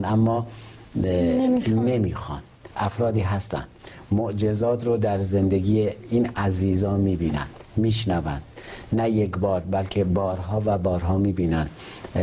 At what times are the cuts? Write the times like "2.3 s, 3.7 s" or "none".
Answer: 2.7 s